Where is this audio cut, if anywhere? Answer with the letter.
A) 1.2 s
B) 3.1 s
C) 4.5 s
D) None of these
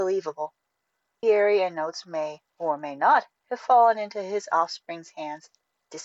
A